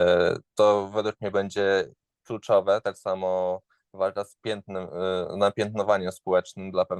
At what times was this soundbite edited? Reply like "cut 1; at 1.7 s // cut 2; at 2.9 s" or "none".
none